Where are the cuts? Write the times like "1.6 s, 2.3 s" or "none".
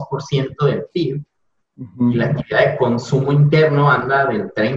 none